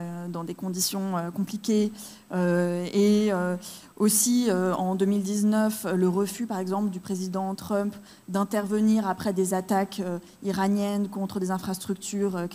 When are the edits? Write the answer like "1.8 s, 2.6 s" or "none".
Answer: none